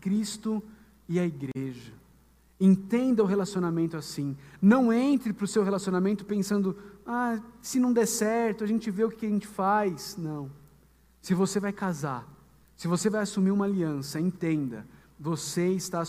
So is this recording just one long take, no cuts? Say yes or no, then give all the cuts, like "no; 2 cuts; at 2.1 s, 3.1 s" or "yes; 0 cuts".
yes; 0 cuts